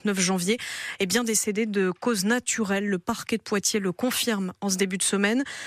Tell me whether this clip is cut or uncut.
uncut